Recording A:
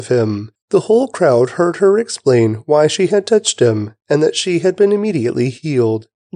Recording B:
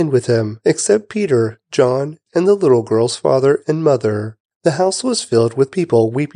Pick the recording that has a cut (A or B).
B